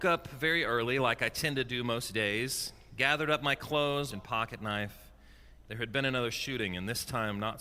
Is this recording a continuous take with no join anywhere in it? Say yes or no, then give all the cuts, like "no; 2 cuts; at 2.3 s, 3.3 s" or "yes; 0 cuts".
no; 2 cuts; at 4.1 s, 5.6 s